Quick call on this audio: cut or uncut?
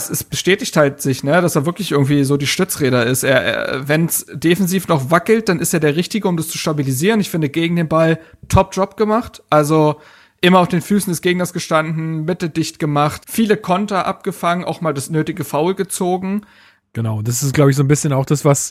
cut